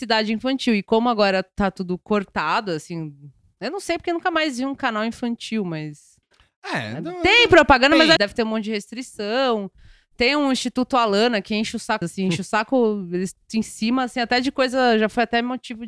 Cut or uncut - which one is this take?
cut